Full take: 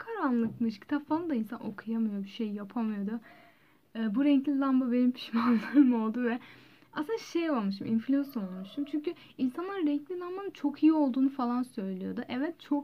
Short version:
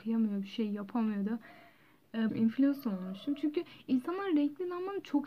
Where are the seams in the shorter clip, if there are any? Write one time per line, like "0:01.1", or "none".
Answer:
0:02.3

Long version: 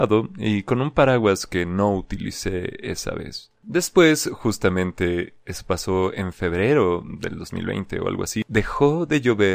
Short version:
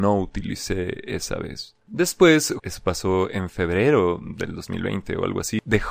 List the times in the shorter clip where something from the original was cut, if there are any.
0:02.6

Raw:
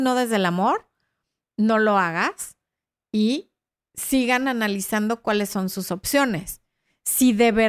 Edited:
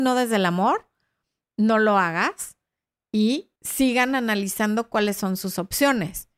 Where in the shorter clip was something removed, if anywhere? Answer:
0:03.6

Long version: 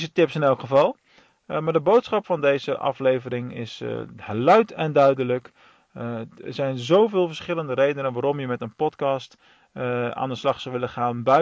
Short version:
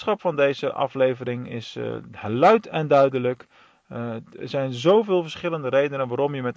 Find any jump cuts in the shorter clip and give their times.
none

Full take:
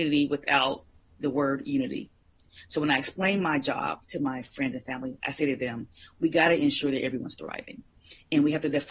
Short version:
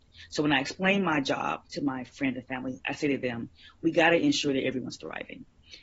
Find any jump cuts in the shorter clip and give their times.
none

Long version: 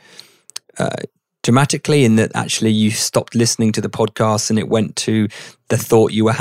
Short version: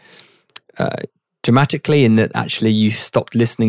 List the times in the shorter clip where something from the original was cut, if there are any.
none

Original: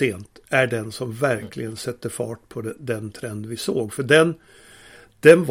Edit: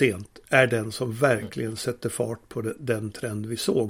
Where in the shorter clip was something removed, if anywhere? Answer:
none

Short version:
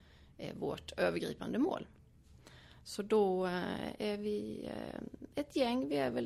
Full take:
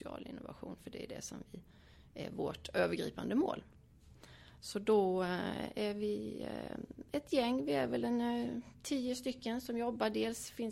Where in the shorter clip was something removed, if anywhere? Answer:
none

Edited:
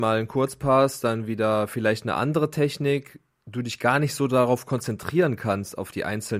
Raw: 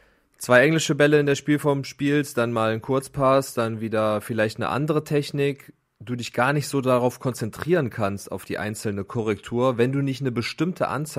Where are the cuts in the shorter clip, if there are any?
none

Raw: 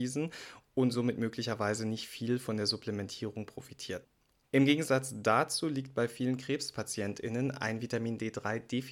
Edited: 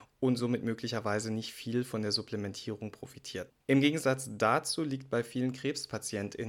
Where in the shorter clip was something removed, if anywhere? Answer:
0:03.6

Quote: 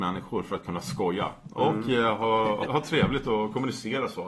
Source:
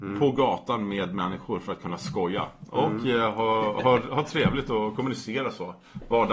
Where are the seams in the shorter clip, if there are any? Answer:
0:02.7

